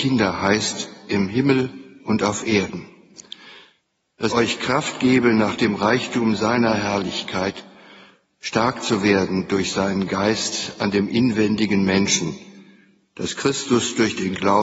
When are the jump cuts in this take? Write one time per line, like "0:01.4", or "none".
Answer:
0:04.3